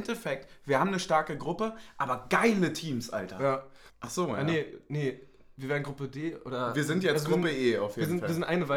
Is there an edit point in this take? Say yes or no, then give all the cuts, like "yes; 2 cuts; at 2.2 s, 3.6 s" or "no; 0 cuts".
yes; 1 cut; at 3.9 s